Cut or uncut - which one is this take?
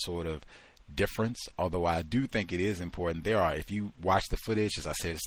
uncut